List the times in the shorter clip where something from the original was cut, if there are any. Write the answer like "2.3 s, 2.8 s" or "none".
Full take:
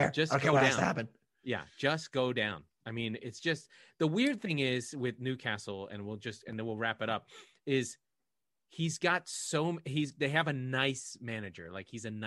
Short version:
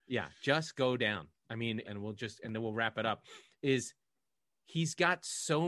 1.8 s

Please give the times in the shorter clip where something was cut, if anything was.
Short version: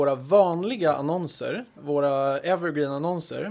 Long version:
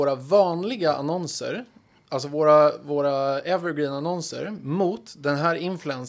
1.8 s

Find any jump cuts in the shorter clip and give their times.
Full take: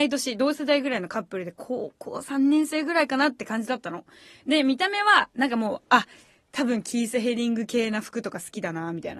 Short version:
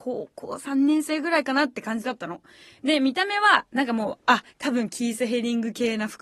4.5 s

